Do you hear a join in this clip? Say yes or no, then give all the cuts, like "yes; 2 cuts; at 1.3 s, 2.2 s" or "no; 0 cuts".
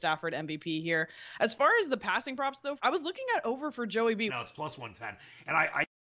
yes; 2 cuts; at 2.8 s, 4.3 s